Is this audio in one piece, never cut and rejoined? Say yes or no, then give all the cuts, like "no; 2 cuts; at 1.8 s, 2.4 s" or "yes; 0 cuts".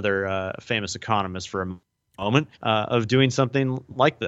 no; 1 cut; at 2.5 s